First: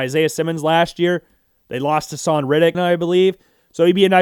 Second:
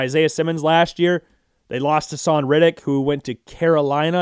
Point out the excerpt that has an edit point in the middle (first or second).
first